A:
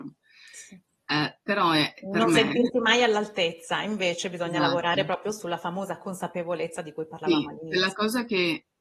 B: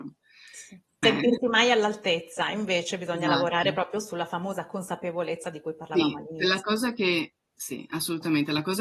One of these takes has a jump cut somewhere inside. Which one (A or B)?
B